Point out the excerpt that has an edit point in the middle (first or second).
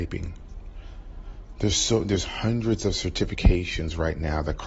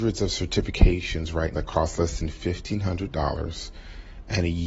second